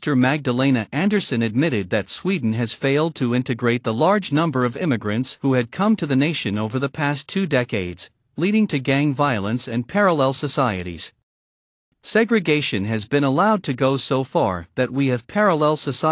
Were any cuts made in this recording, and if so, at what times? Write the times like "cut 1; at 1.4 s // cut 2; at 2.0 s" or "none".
none